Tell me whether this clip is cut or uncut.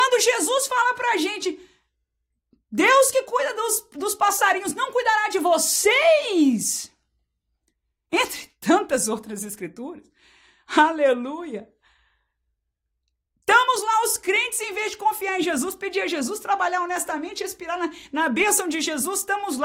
uncut